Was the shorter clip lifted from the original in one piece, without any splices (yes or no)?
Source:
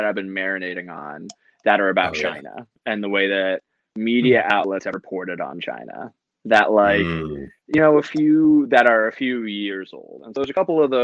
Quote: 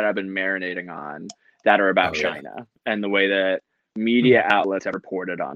yes